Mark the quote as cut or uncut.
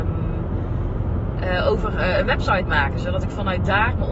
uncut